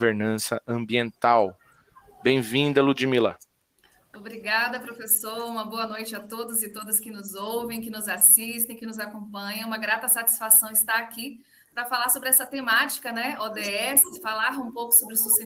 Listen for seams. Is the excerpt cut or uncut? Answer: uncut